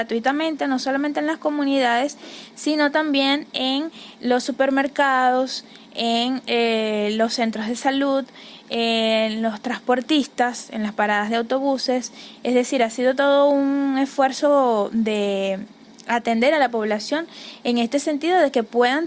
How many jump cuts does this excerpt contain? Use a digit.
0